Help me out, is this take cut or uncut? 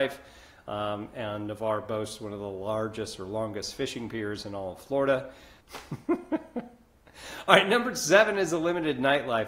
cut